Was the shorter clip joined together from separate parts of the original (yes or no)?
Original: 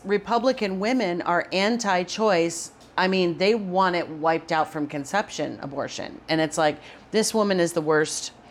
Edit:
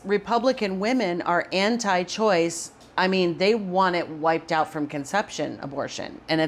no